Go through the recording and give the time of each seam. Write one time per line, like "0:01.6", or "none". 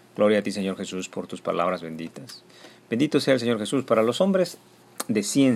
none